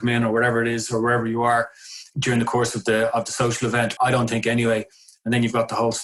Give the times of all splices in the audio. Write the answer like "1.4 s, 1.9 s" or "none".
4.0 s